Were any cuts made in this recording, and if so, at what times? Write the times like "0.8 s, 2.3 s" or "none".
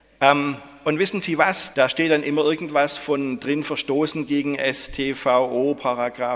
1.7 s